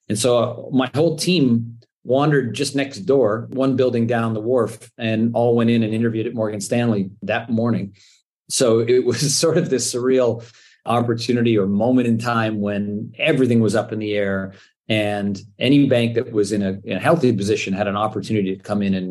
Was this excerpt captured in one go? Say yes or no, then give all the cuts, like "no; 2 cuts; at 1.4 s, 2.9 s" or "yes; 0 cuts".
yes; 0 cuts